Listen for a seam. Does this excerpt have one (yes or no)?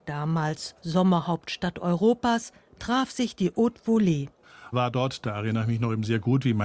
yes